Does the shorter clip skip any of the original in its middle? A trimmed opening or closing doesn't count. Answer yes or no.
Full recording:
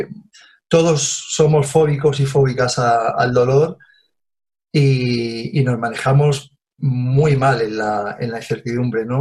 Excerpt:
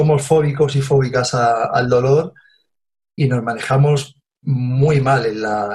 yes